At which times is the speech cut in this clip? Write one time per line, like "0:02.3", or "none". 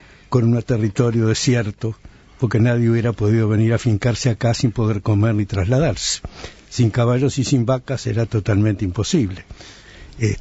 none